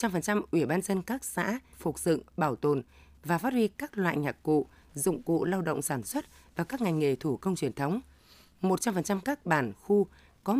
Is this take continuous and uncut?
no; 1 cut; at 1.7 s

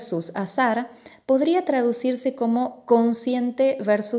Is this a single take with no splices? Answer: yes; 0 cuts

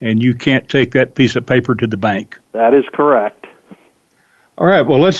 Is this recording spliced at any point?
yes; 1 cut; at 2.4 s

